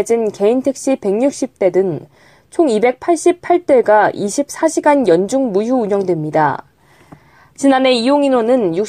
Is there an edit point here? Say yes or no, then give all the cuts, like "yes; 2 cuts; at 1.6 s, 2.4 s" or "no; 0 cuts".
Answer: no; 0 cuts